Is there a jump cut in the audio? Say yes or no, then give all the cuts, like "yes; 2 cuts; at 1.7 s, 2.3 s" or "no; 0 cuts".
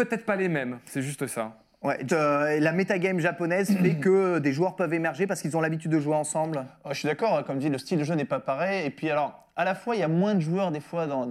yes; 1 cut; at 2.1 s